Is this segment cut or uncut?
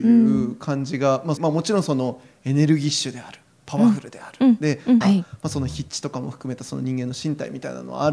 cut